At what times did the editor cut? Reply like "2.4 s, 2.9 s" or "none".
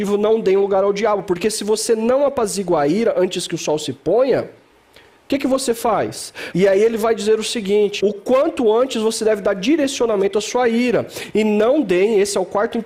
6.5 s, 8.0 s